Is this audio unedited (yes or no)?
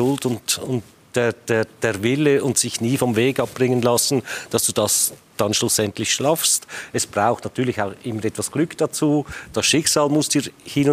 yes